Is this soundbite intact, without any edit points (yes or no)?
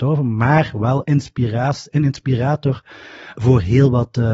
no